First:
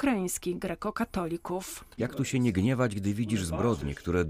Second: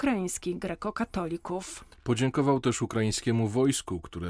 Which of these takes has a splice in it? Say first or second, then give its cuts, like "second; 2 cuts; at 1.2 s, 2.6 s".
first; 1 cut; at 2.0 s